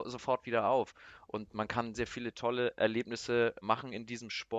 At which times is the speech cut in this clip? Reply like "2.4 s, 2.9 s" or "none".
1.9 s, 3.6 s